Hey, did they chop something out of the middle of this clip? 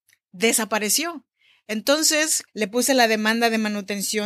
yes; 1 cut; at 2.5 s

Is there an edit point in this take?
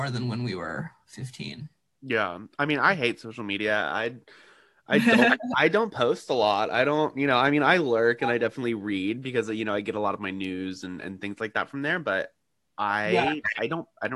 no; 0 cuts

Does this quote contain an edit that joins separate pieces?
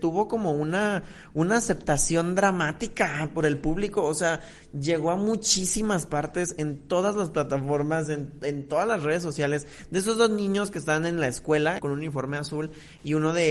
yes; 1 cut; at 11.8 s

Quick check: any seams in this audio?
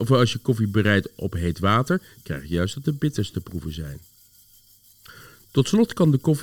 no; 0 cuts

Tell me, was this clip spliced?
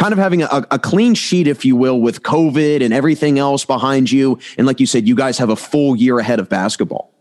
no; 0 cuts

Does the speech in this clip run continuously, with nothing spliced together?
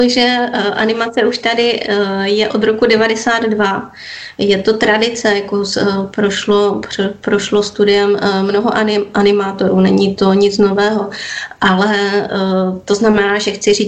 yes; 0 cuts

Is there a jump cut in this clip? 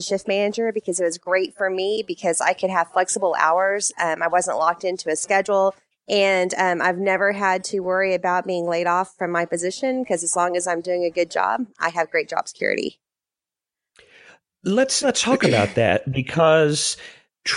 yes; 2 cuts; at 5.9 s, 15.0 s

